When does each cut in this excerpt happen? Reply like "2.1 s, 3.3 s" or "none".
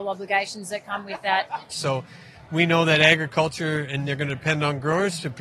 1.7 s